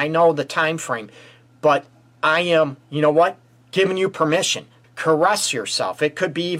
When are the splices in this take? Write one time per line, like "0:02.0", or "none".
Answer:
0:04.8

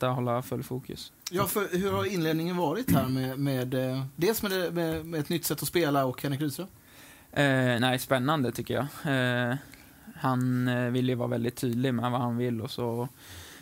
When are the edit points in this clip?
none

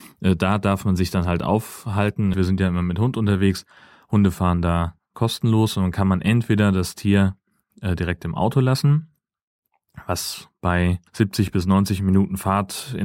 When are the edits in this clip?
0:02.3
0:11.1

